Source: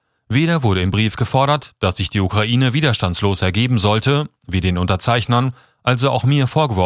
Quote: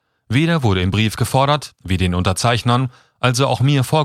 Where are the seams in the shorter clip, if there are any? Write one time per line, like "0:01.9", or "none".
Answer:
0:01.7